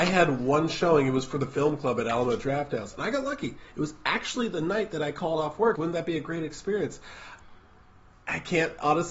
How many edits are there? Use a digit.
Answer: 1